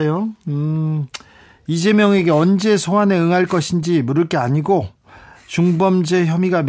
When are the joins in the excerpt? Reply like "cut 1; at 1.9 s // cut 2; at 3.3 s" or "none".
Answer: none